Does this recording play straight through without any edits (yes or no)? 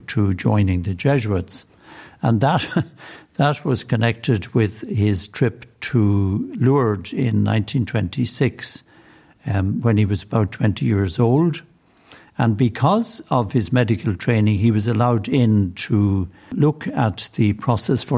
yes